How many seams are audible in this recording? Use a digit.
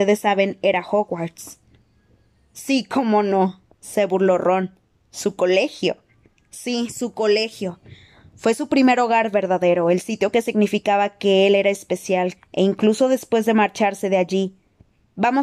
1